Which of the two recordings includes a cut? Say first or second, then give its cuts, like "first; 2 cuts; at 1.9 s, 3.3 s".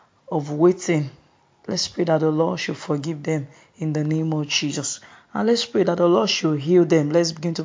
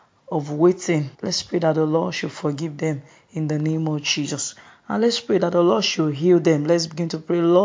second; 1 cut; at 1.1 s